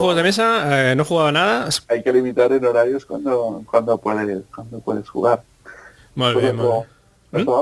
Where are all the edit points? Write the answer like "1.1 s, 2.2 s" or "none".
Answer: 1.8 s, 6.0 s